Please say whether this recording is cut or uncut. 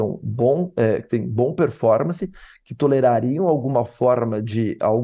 uncut